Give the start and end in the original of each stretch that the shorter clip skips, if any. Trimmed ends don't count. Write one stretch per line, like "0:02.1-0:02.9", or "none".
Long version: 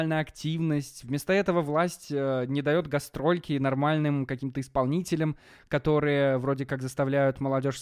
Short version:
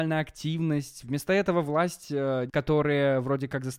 0:02.5-0:05.6